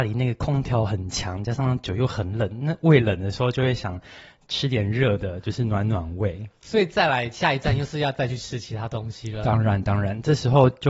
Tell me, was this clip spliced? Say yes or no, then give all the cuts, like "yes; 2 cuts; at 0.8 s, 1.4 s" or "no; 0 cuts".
no; 0 cuts